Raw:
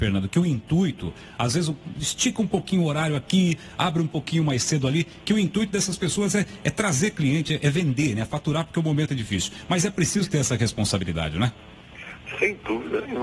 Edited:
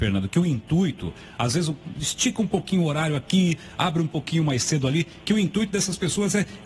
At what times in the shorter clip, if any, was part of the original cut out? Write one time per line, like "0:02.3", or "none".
none